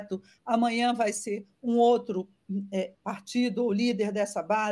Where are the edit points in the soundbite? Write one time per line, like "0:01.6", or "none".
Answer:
0:02.9